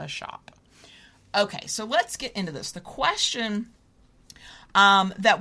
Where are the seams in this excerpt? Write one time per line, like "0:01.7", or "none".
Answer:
none